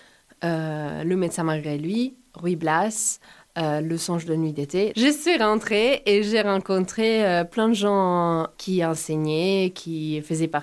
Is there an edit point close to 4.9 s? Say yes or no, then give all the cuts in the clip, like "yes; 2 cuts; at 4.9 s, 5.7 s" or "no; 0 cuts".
yes; 1 cut; at 4.9 s